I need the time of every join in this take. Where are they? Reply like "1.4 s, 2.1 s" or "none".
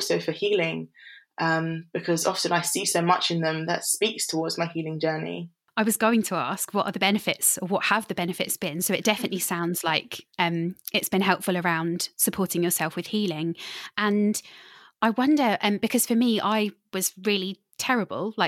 none